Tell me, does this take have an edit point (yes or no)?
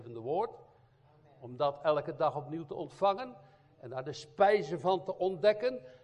no